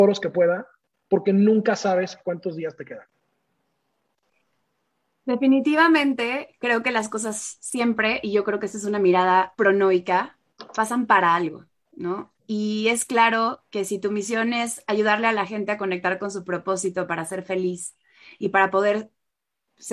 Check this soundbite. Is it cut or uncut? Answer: cut